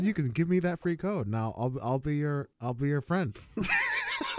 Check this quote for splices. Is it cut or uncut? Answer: cut